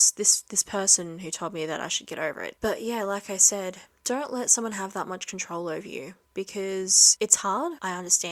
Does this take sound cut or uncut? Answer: cut